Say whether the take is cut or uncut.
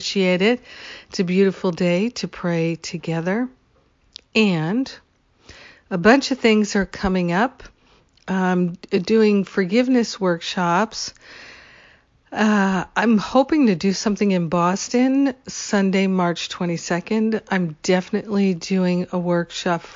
uncut